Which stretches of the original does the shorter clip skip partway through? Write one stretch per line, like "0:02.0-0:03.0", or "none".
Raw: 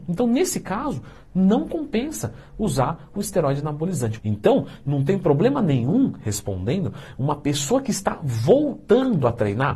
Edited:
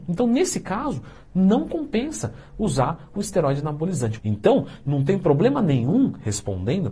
none